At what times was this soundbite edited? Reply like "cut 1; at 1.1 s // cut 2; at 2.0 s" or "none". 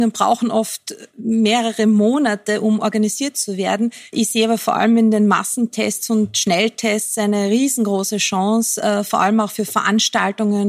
cut 1; at 4.1 s